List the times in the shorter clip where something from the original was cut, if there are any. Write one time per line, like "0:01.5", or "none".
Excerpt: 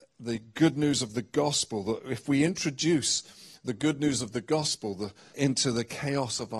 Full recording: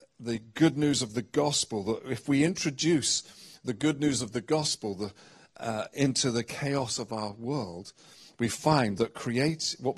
0:05.3

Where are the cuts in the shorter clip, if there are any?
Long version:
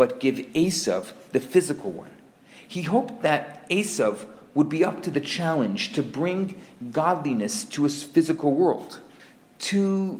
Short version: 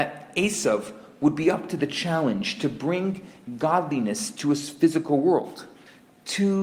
none

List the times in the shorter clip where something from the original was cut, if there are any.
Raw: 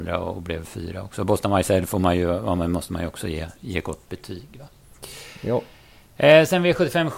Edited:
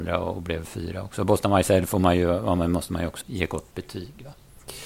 0:03.2

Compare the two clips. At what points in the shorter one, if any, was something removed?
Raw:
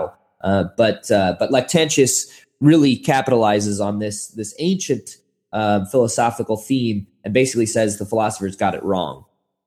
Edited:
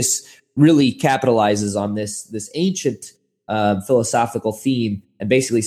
none

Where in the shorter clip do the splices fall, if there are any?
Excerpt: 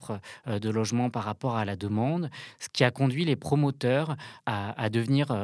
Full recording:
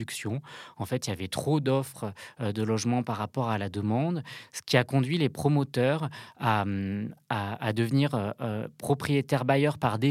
0:04.4

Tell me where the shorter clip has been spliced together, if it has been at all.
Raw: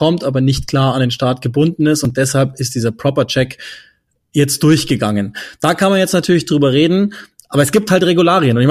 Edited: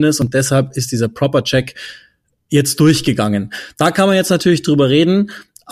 none

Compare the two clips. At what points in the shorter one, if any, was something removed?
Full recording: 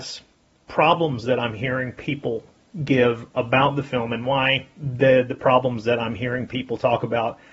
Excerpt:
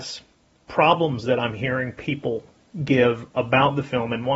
none

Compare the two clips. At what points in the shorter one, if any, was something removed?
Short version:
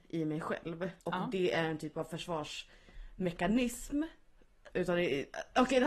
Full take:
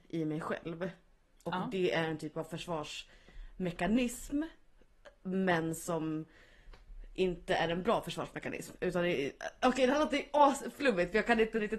0:01.0
0:04.7

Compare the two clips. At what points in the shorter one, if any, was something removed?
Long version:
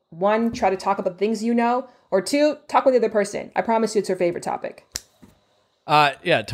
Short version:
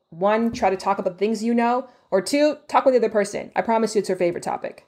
none

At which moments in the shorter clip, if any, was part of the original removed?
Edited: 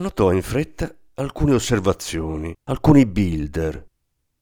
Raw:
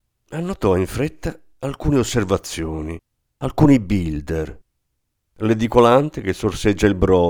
0:02.6

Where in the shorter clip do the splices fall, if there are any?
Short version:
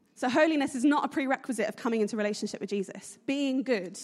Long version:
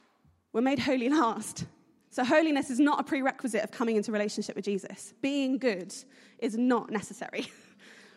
none

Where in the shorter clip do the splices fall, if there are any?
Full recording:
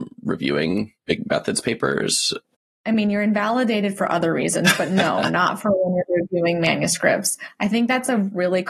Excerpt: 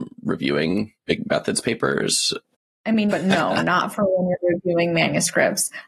0:03.1

